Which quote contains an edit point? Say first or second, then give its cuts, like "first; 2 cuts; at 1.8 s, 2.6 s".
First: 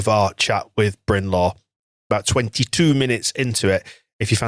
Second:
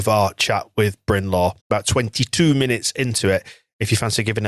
second; 1 cut; at 1.6 s